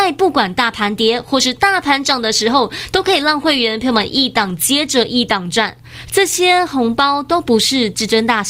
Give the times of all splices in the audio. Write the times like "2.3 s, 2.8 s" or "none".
6.1 s

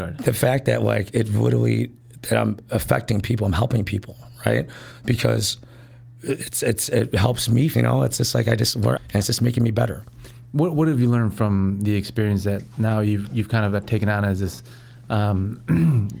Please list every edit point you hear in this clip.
7.7 s, 9.0 s

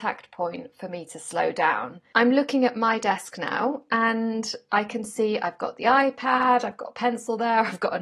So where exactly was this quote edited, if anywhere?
2.1 s

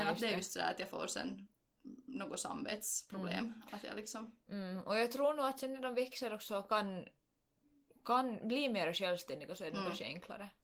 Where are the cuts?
none

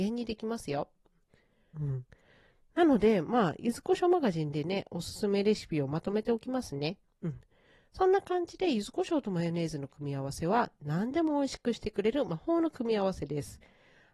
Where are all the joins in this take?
1.7 s

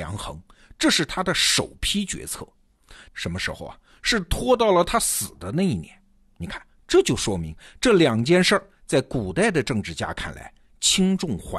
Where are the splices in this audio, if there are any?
3.1 s

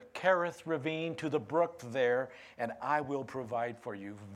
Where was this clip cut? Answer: none

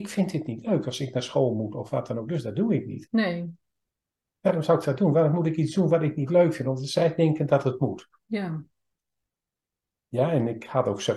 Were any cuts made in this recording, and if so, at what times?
none

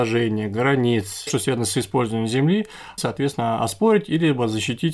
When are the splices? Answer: 1.3 s, 3.0 s

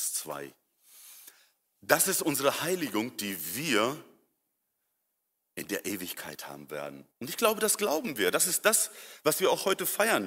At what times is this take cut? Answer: 7.1 s

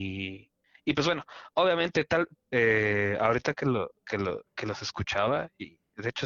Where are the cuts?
2.4 s

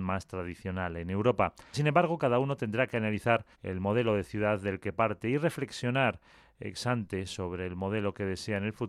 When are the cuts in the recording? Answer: 1.7 s, 3.5 s

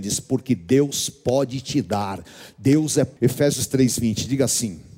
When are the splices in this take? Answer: 3.2 s

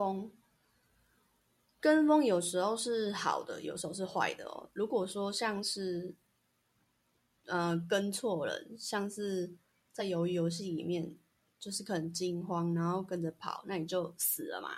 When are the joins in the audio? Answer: none

